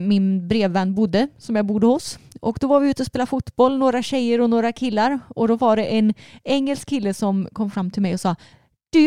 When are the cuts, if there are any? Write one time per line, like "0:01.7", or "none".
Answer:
none